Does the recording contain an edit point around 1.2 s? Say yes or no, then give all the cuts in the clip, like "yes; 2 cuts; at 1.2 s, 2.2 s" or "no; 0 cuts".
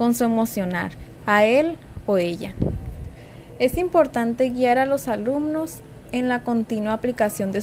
yes; 1 cut; at 1.2 s